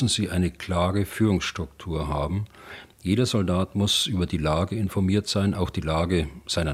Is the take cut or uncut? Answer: uncut